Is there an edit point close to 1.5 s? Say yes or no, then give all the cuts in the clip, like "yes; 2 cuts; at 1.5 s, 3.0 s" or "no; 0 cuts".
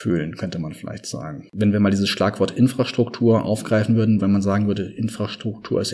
yes; 2 cuts; at 1.5 s, 4.2 s